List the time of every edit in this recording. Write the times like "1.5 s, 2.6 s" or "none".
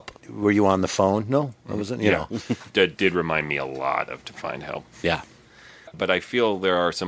2.7 s, 5.9 s